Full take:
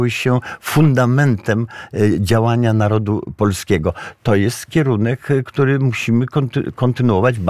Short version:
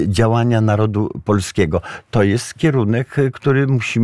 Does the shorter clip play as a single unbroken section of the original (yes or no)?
yes